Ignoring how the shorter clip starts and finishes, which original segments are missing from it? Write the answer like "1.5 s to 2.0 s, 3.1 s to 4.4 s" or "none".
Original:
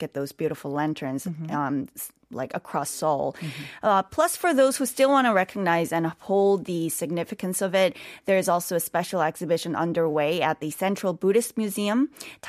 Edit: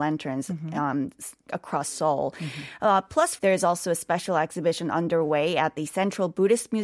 2.2 s to 2.5 s, 4.4 s to 8.2 s

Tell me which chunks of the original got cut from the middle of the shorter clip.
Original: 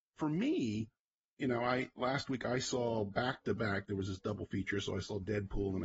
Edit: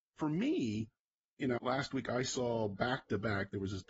1.6 s to 1.9 s

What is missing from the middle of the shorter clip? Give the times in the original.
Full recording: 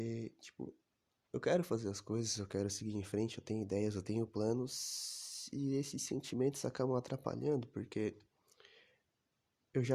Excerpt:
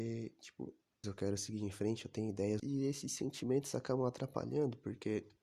1.0 s to 2.4 s, 3.9 s to 5.5 s

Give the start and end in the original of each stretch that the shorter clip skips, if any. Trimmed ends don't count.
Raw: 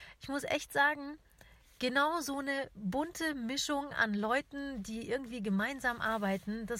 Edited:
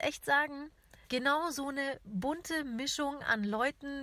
1.5 s to 1.7 s

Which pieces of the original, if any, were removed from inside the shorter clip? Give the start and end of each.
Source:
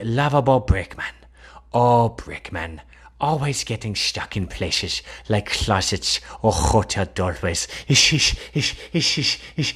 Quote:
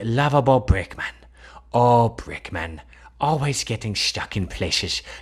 none

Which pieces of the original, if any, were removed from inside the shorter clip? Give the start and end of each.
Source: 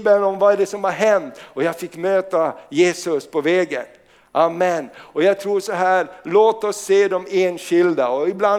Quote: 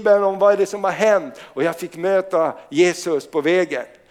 none

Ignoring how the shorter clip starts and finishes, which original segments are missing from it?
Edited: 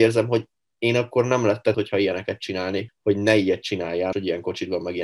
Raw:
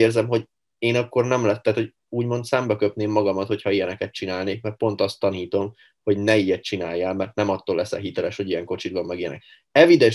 1.7 s to 3.5 s, 4.6 s to 5.9 s, 7.1 s to 8.4 s

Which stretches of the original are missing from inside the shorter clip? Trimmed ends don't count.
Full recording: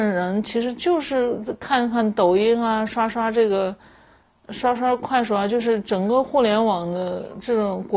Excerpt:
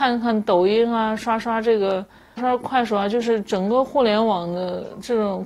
4.1 s to 4.8 s

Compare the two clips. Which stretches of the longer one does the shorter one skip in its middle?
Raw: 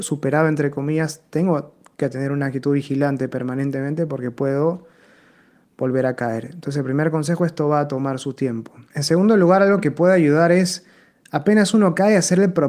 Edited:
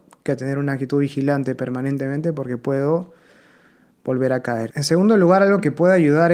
6.4 s to 8.9 s

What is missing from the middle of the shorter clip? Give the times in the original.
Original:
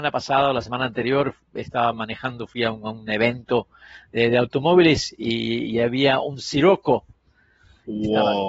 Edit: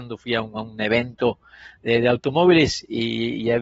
none

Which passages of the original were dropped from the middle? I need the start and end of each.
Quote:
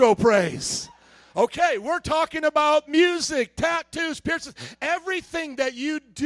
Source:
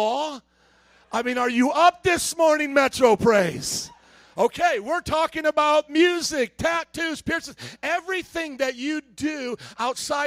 none

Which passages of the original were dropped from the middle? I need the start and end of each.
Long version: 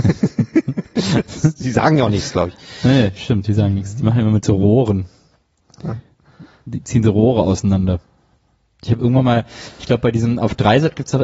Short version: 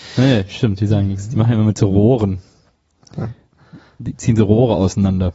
none

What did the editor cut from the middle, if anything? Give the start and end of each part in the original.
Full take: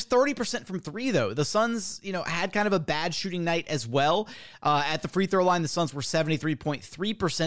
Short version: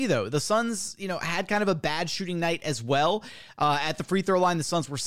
none

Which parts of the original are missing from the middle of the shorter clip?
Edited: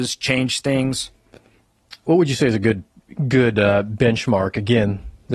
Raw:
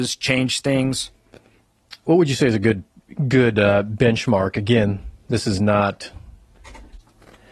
none

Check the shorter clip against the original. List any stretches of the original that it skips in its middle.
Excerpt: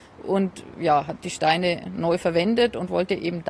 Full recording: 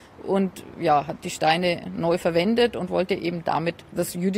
none

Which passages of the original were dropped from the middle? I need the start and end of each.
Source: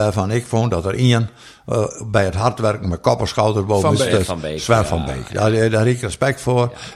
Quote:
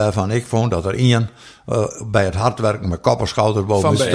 none

